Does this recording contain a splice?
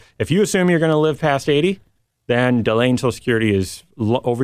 no; 0 cuts

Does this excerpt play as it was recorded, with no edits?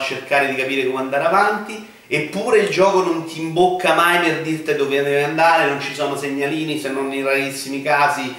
yes; 0 cuts

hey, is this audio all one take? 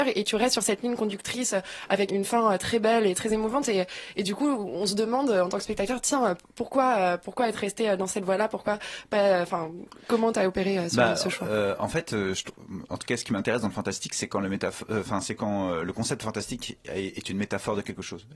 no; 1 cut; at 2.1 s

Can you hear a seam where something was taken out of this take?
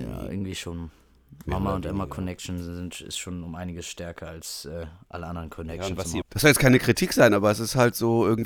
yes; 1 cut; at 6.2 s

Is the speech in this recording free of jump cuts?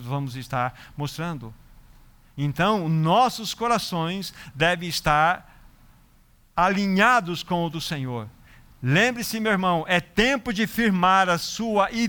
yes; 0 cuts

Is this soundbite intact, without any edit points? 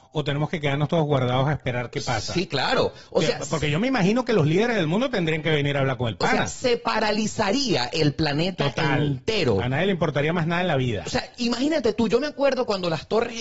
yes; 0 cuts

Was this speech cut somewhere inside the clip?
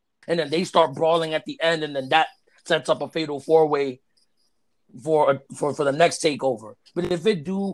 yes; 1 cut; at 6.9 s

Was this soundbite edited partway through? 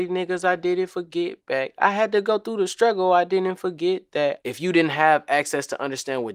yes; 1 cut; at 4.4 s

